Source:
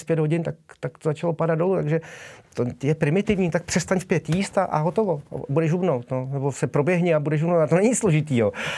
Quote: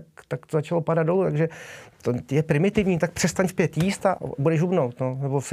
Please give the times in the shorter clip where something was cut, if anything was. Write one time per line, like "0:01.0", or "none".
0:04.1